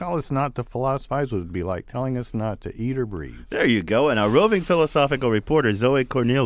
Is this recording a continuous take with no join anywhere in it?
yes; 0 cuts

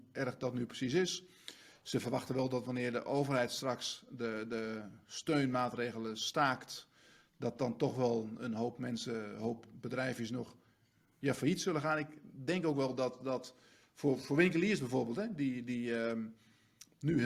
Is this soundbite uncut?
yes; 0 cuts

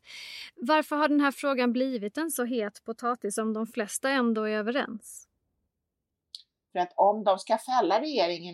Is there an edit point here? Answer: yes; 1 cut; at 6.7 s

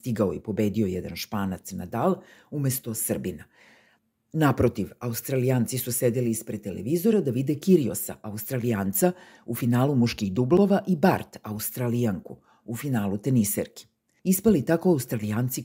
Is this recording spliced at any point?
no; 0 cuts

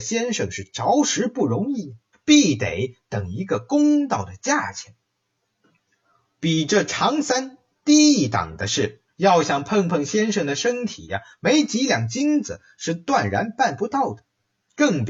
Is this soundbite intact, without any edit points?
no; 2 cuts; at 2.1 s, 9.1 s

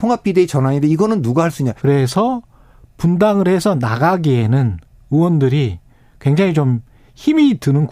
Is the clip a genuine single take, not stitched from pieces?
no; 1 cut; at 1.8 s

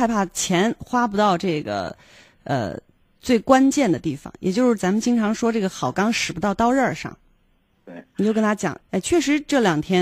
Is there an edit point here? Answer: yes; 2 cuts; at 7.7 s, 8.8 s

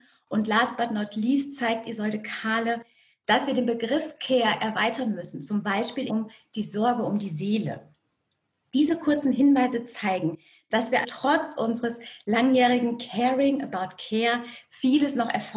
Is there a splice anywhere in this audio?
yes; 2 cuts; at 6.1 s, 11.0 s

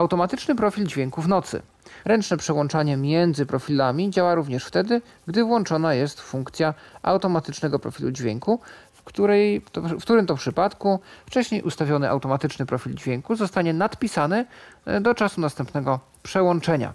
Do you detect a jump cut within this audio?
yes; 1 cut; at 2.0 s

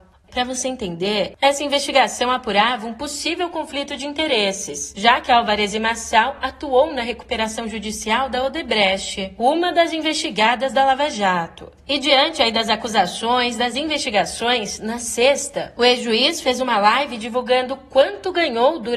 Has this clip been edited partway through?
no; 0 cuts

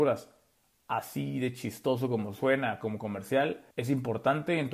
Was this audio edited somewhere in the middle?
yes; 1 cut; at 3.7 s

